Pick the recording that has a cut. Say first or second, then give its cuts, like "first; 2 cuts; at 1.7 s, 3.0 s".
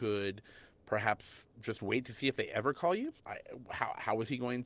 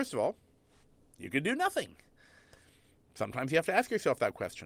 first; 1 cut; at 3.2 s